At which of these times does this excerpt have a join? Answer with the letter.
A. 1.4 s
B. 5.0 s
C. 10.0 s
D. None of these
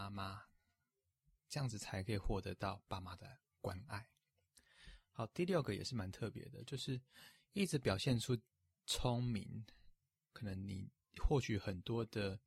D